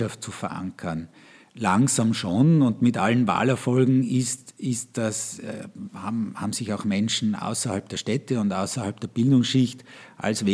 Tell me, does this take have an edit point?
no; 0 cuts

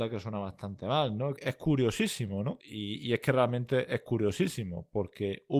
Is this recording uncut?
no; 2 cuts; at 1.4 s, 2.6 s

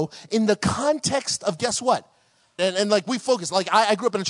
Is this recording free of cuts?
no; 1 cut; at 2.6 s

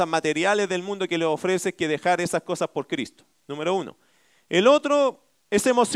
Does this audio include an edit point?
no; 0 cuts

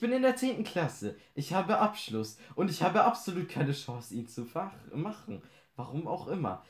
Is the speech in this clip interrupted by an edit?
no; 0 cuts

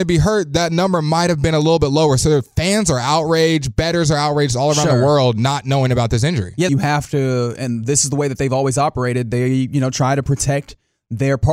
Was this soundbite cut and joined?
yes; 1 cut; at 6.7 s

